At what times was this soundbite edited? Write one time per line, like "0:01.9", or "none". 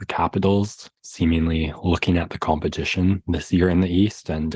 none